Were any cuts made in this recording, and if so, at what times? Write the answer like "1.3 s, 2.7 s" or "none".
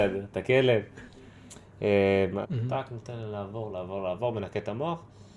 2.4 s, 3.7 s